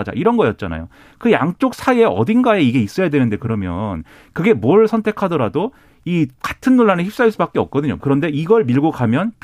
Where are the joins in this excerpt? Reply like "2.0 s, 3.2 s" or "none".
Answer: 8.0 s

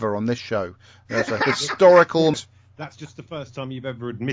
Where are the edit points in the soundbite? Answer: 2.3 s

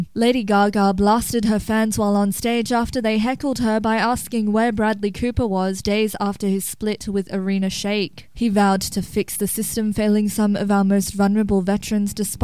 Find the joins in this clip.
5.8 s, 8.3 s

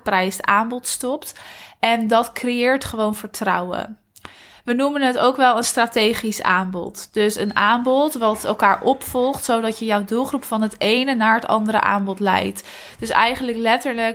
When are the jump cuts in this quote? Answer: 1.8 s

